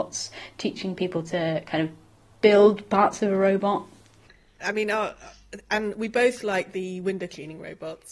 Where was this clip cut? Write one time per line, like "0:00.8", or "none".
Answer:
0:04.6